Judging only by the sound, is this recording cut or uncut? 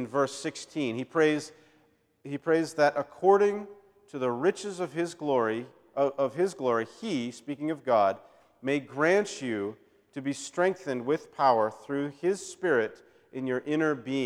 uncut